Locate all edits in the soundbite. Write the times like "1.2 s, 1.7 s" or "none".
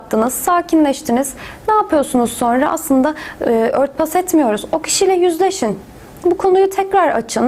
3.4 s